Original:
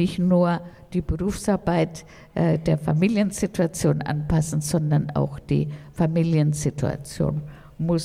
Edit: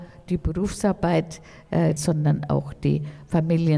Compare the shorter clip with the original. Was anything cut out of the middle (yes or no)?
yes